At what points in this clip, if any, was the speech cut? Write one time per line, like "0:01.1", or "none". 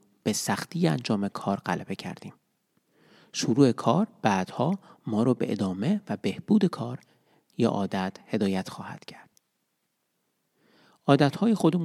none

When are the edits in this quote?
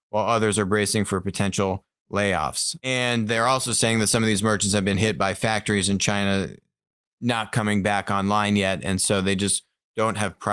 none

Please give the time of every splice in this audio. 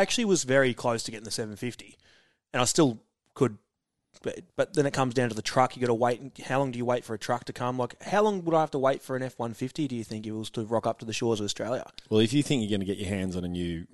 0:04.5

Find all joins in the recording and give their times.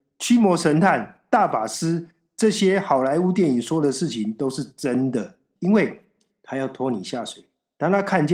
0:05.6

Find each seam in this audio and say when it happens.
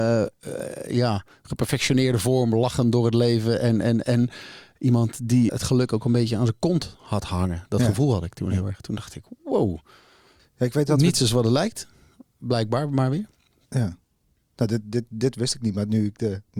0:05.5

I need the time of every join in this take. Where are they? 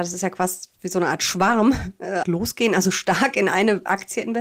0:02.2

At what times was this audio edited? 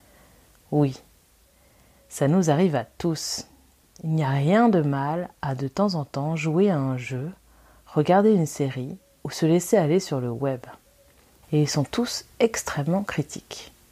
0:03.8
0:11.4

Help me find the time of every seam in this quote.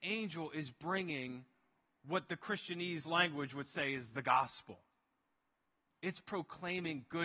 none

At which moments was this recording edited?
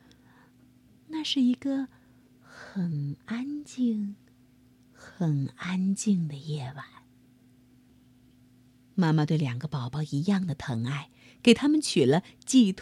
0:01.0

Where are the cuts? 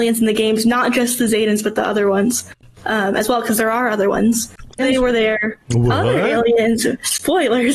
0:04.8

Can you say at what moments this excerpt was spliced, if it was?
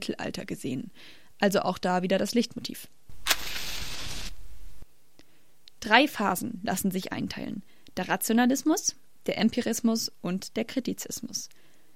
none

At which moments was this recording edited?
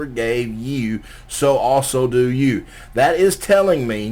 none

